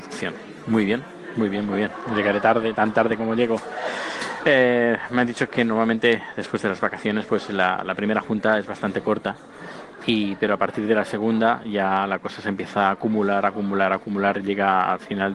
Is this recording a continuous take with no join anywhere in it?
yes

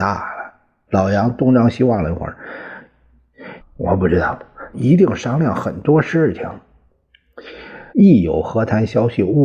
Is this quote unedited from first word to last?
no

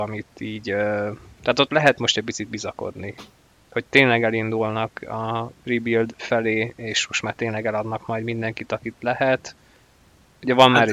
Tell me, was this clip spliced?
no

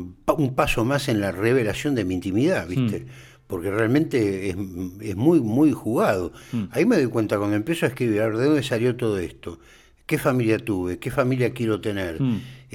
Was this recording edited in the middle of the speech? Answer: no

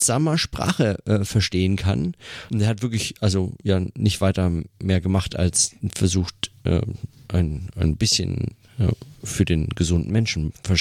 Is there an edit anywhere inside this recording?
yes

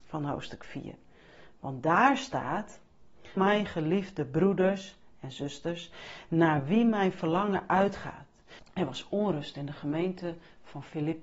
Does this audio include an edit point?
yes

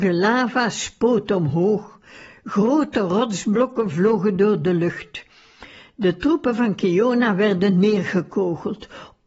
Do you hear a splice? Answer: no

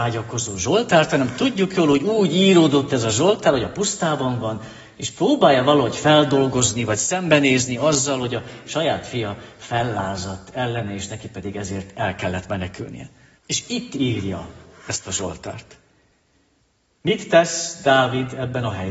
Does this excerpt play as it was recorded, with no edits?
no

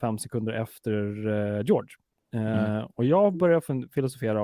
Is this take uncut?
yes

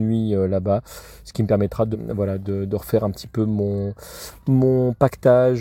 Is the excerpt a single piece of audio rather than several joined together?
no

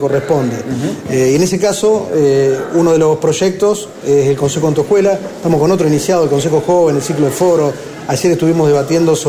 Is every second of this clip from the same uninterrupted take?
yes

